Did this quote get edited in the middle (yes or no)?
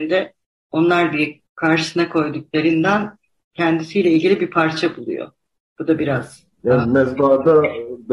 yes